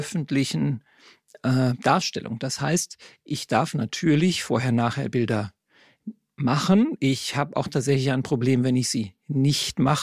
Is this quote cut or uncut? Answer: uncut